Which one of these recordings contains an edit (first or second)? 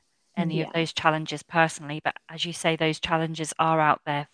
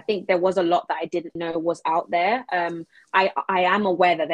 second